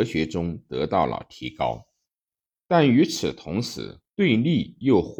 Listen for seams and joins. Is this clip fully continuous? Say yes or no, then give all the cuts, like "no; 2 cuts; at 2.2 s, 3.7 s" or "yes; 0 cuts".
no; 2 cuts; at 2.6 s, 4.1 s